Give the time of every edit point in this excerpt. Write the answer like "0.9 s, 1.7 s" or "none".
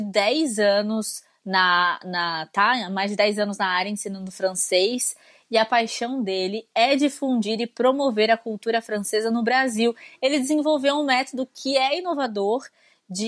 none